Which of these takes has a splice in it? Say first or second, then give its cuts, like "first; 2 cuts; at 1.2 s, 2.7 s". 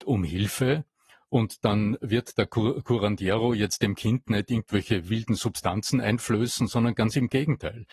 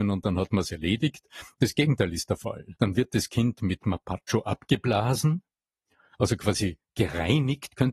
second; 1 cut; at 2.7 s